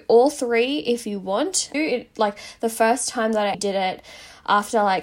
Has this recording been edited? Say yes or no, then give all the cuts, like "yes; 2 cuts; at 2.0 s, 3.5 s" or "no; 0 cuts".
yes; 2 cuts; at 1.7 s, 3.5 s